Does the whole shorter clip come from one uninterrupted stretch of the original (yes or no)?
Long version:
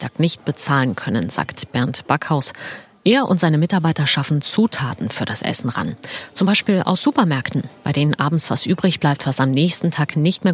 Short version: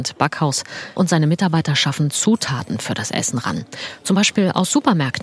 no